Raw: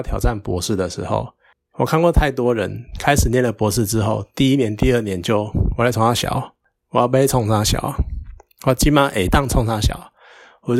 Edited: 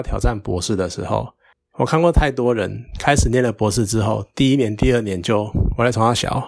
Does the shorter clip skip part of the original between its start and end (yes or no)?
no